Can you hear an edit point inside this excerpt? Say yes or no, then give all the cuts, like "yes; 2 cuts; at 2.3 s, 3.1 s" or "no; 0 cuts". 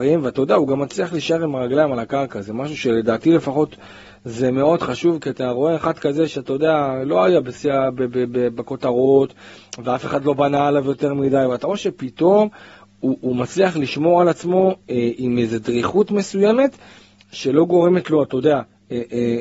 no; 0 cuts